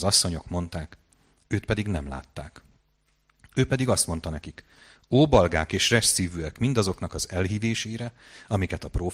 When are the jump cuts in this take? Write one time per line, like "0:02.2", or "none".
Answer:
none